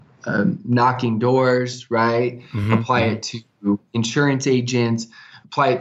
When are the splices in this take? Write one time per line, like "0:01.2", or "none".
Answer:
none